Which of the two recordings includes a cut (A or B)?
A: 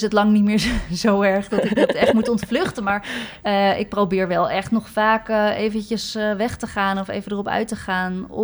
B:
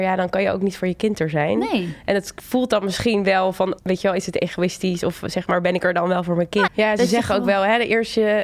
B